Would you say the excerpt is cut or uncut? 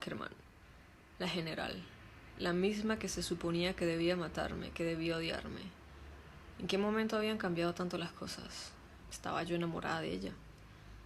cut